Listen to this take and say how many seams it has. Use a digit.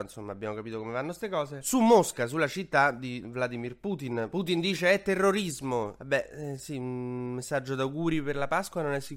0